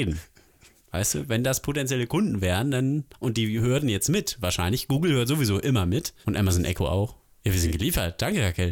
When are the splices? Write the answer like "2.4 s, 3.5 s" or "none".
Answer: none